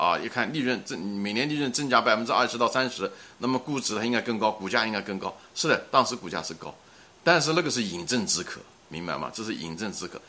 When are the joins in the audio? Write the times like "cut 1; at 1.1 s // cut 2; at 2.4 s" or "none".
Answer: none